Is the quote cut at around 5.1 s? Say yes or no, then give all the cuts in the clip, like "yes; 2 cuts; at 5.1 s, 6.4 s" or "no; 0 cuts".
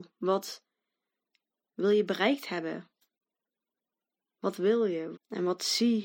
yes; 1 cut; at 5.1 s